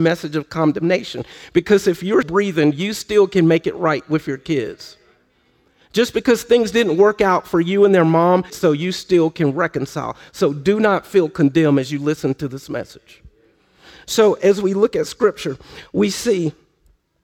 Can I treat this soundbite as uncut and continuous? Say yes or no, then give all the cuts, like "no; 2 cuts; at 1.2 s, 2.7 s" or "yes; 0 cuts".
no; 2 cuts; at 2.2 s, 8.5 s